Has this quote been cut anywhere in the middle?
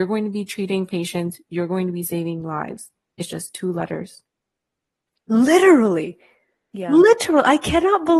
no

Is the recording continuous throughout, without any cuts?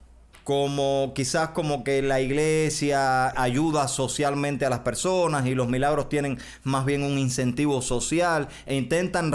no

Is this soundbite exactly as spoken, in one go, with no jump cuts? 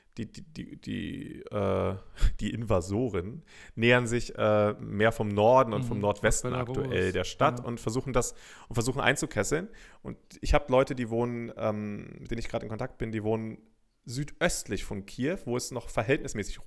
yes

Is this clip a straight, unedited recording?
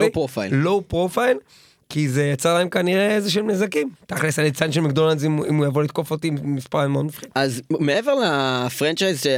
no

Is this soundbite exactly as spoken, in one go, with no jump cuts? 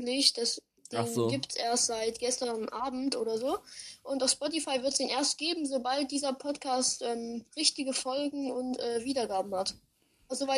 yes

